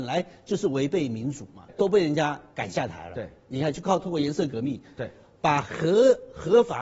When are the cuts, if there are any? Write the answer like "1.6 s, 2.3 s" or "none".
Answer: 1.7 s

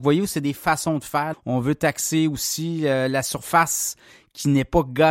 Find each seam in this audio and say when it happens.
1.3 s

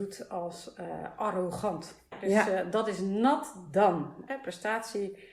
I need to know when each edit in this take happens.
2.1 s, 4.3 s

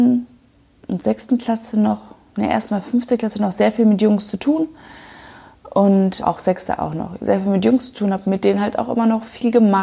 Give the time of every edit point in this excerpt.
6.2 s

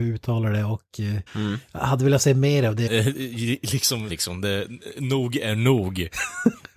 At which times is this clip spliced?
1.3 s, 2.9 s, 4.1 s

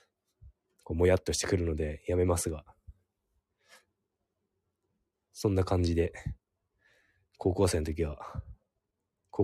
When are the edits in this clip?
none

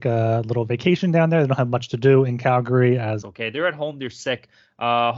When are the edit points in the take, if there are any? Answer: 3.2 s

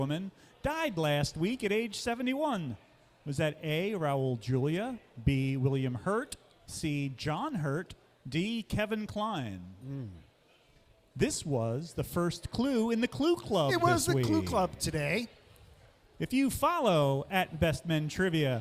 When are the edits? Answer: none

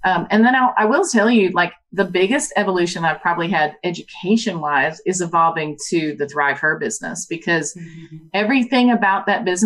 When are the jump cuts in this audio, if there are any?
none

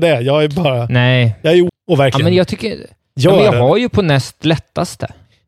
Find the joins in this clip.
1.7 s

